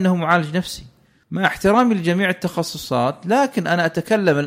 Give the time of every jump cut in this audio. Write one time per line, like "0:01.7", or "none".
0:01.2